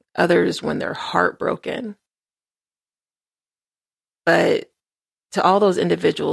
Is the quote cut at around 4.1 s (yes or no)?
no